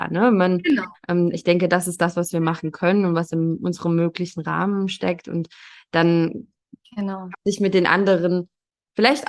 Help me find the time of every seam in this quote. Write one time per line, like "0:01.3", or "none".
0:00.9
0:07.3

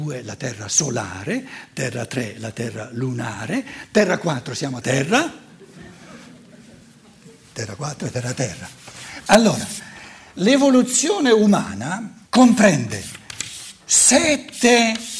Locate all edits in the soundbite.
0:04.8
0:09.3
0:12.3

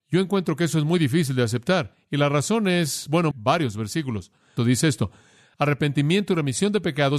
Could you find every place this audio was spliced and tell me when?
0:03.3
0:04.6

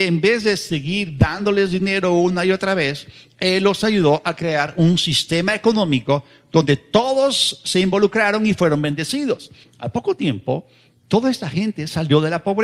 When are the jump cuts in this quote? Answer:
0:09.6

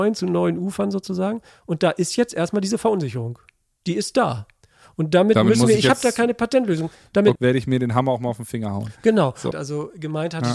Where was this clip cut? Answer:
0:07.4
0:09.5

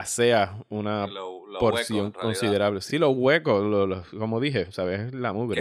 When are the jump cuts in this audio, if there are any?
none

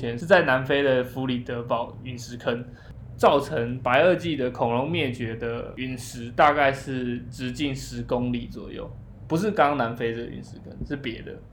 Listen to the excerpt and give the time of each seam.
none

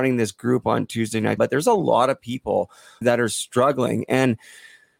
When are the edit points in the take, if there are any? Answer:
0:01.4
0:03.0

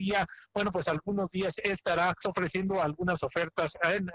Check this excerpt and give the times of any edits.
0:02.2

